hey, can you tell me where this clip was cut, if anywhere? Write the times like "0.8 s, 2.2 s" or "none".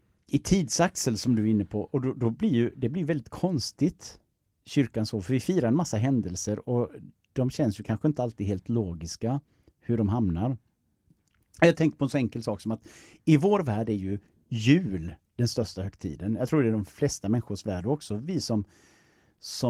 none